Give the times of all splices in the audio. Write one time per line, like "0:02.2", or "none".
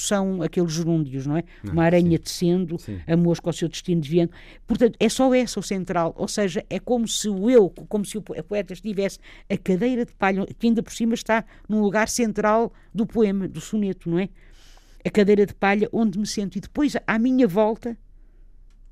none